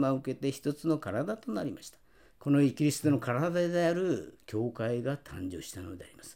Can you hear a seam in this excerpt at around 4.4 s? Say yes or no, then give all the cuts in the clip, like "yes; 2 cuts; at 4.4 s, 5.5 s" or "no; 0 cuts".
no; 1 cut; at 2.3 s